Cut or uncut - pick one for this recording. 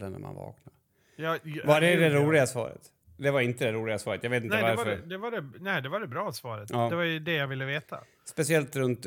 uncut